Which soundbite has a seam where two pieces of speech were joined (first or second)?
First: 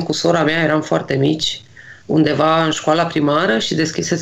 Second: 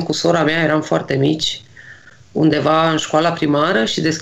first